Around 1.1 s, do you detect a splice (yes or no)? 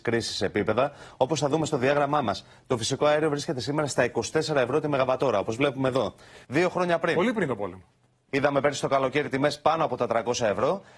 no